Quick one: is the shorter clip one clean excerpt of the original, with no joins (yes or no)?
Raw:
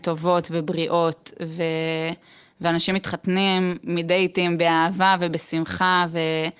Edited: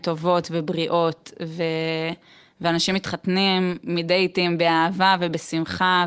yes